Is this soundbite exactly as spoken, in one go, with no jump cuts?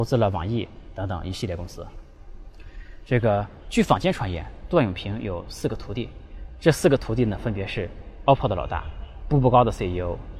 no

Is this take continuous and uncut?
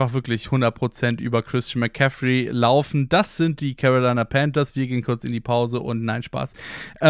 yes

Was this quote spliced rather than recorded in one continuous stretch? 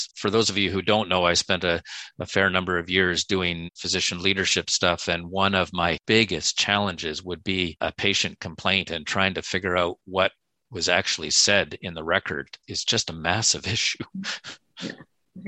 no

